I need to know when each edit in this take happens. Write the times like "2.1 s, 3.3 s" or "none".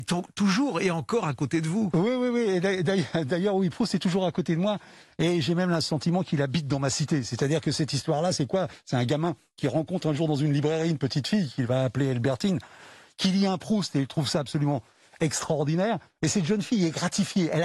none